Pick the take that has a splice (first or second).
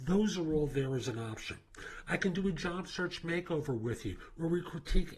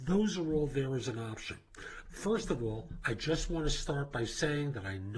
second